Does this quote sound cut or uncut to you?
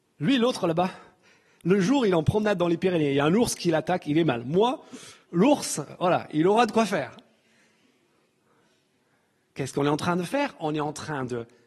uncut